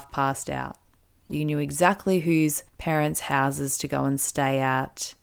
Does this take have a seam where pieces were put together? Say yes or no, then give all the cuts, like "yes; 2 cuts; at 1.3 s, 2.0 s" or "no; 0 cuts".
yes; 2 cuts; at 1.3 s, 2.7 s